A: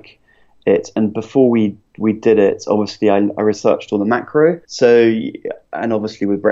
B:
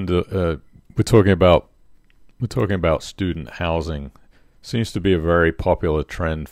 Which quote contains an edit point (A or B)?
A